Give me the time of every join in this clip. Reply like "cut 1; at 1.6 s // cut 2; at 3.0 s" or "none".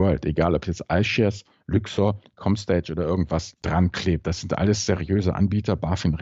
none